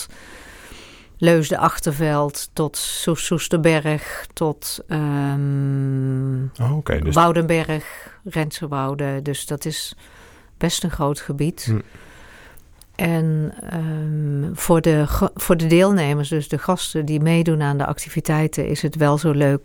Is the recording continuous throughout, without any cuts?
yes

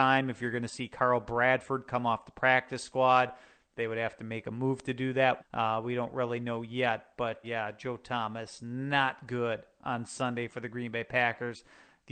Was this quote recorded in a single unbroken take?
no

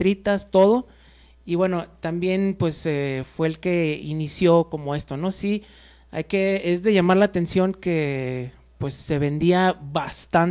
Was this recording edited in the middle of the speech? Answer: no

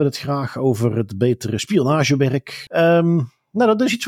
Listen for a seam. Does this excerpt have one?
yes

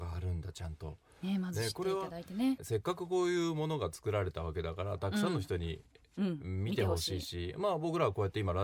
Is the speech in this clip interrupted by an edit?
yes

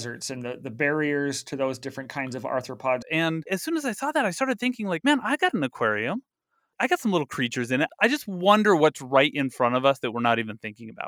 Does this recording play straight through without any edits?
no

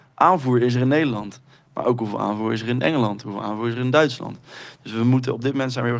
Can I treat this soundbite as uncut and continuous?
yes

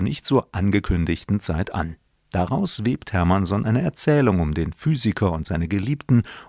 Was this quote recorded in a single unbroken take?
yes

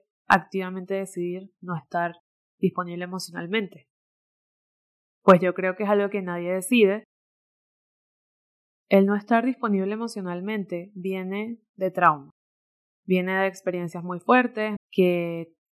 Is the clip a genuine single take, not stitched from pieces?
no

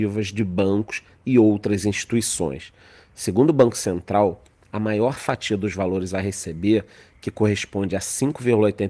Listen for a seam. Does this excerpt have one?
no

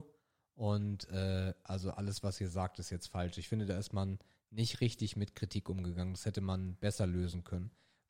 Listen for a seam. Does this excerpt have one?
no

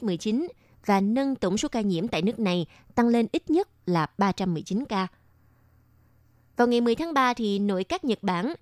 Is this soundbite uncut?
yes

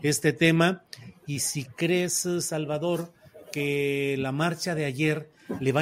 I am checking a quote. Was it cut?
no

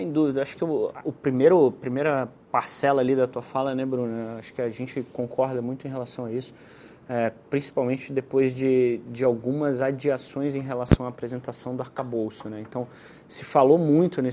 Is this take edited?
yes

